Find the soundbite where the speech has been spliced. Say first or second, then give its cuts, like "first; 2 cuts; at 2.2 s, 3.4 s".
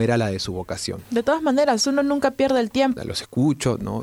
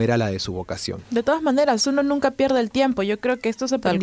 first; 1 cut; at 3.0 s